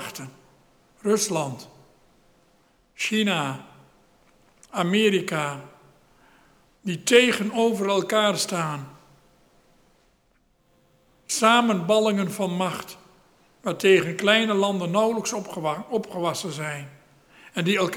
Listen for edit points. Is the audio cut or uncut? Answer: uncut